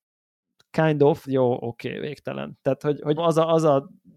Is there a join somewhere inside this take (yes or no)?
yes